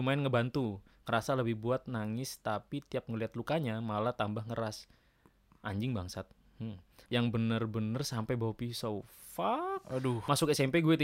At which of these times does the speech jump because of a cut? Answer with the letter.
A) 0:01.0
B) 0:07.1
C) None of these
B